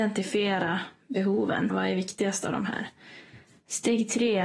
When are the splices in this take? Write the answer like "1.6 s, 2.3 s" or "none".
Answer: 1.7 s